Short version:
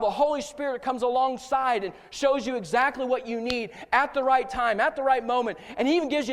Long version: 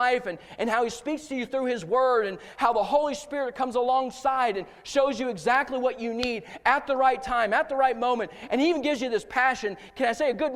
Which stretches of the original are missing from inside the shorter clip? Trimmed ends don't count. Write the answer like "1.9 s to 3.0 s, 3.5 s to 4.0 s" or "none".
none